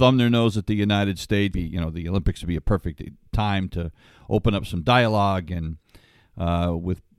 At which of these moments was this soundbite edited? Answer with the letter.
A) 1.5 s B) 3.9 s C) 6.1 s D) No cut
A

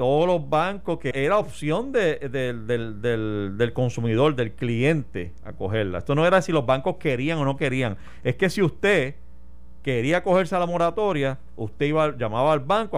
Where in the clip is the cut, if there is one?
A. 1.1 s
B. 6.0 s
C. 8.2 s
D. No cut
A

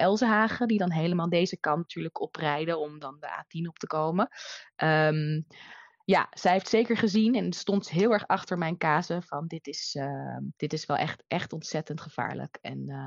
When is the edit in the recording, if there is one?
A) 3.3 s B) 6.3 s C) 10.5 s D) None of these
C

